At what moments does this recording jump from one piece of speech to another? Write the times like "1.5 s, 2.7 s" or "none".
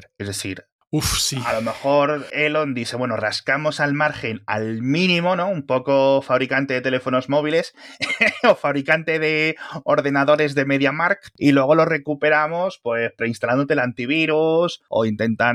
none